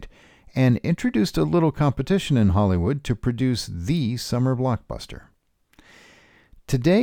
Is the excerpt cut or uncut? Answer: uncut